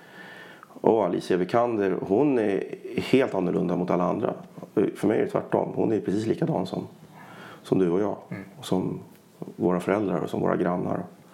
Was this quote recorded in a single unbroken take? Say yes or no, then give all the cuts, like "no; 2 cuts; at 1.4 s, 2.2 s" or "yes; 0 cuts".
yes; 0 cuts